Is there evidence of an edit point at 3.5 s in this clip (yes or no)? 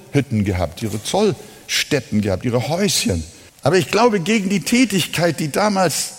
yes